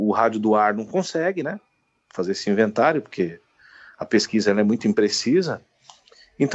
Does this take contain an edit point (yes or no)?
no